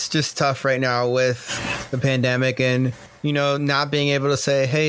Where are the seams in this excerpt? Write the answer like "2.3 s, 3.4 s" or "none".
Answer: none